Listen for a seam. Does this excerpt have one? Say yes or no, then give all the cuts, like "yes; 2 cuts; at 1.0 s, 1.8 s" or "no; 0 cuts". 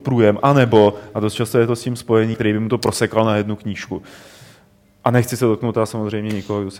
yes; 1 cut; at 2.3 s